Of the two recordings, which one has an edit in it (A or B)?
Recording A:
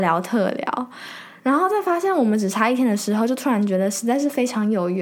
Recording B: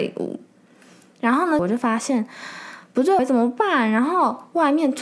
B